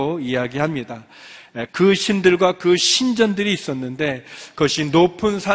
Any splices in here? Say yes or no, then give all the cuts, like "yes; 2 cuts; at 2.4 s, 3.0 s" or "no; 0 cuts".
yes; 1 cut; at 1.7 s